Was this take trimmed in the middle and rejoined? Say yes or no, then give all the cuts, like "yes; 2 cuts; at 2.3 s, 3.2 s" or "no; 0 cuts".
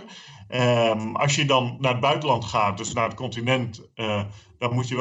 no; 0 cuts